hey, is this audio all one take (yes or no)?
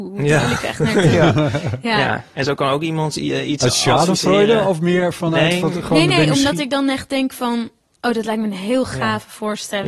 yes